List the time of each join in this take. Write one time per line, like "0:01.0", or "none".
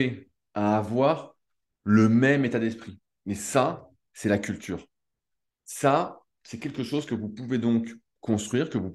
none

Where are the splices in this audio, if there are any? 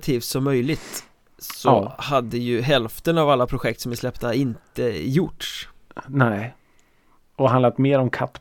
none

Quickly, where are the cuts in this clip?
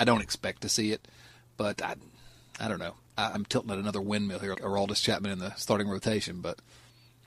0:03.3
0:04.5

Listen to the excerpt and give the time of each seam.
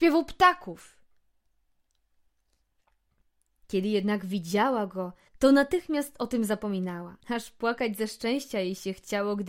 0:05.3
0:07.2

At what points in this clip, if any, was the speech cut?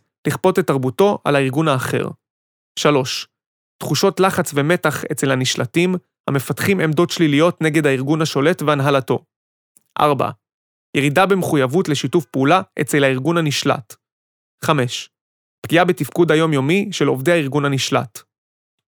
none

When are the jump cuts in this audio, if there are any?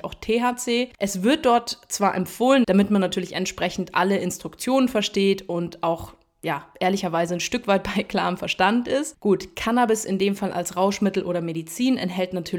0:00.9
0:02.6
0:09.1

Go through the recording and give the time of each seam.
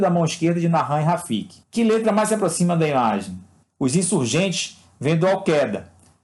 0:01.6
0:03.6

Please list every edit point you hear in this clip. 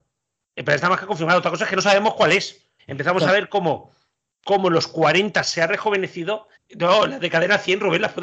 0:02.8
0:06.6

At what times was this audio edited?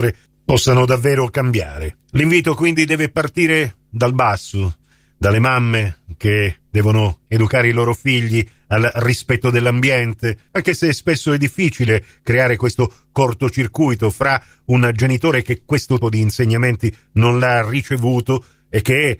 0:10.5
0:16.0

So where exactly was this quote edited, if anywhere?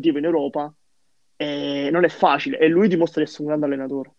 none

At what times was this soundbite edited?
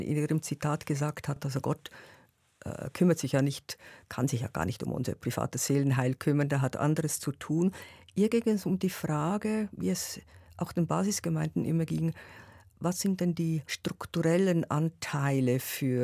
none

